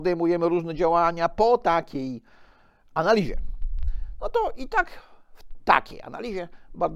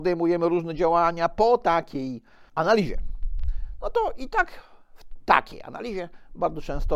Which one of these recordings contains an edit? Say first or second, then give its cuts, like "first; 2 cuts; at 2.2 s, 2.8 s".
second; 1 cut; at 2.5 s